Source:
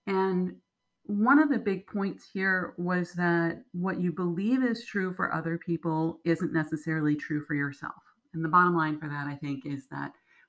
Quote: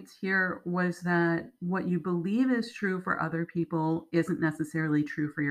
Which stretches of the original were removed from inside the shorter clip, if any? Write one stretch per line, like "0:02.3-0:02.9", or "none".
none